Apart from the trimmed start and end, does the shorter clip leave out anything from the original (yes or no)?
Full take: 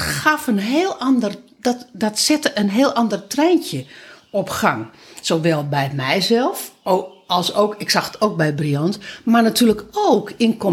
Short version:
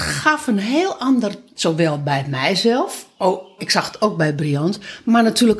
yes